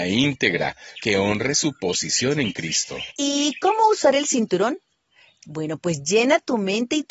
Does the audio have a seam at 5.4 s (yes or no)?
no